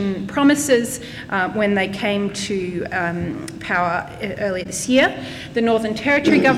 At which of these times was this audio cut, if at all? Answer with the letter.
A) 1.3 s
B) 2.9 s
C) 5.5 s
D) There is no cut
D